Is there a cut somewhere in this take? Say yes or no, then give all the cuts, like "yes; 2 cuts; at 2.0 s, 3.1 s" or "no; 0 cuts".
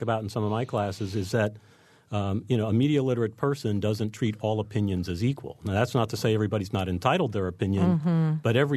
no; 0 cuts